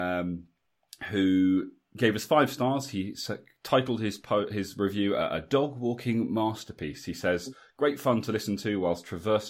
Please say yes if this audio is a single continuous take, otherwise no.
yes